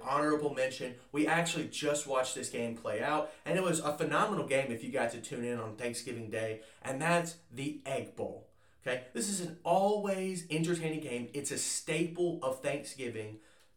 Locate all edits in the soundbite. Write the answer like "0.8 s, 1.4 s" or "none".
none